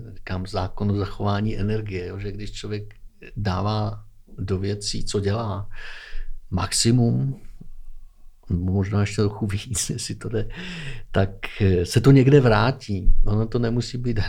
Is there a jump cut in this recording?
no; 0 cuts

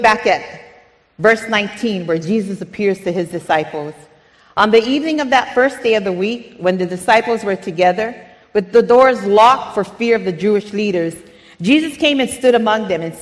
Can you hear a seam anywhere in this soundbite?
no; 0 cuts

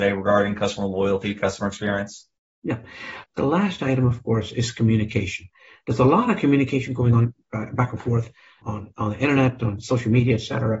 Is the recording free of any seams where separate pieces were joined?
no; 2 cuts; at 3.2 s, 8.6 s

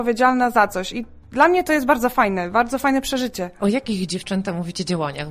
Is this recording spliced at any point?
no; 0 cuts

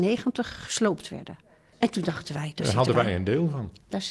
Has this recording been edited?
no; 0 cuts

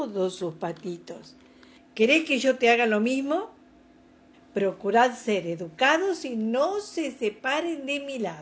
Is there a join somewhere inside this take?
yes; 2 cuts; at 1.8 s, 4.3 s

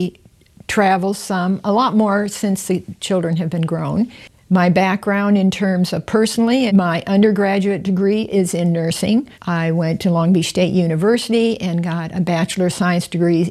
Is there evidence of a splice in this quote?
yes; 2 cuts; at 6.7 s, 9.3 s

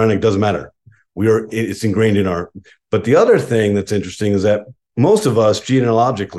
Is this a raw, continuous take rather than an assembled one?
yes; 0 cuts

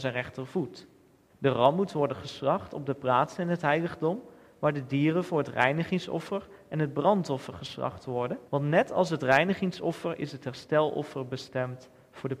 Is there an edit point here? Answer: yes; 2 cuts; at 1.3 s, 8.5 s

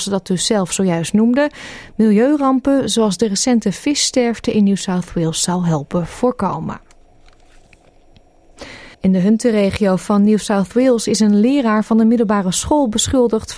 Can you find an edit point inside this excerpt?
yes; 1 cut; at 8.9 s

